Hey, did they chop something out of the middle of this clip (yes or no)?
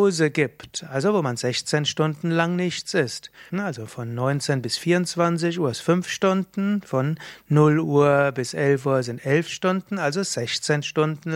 yes